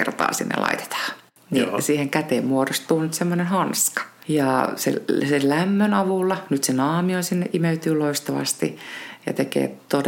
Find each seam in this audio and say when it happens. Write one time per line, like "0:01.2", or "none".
0:04.2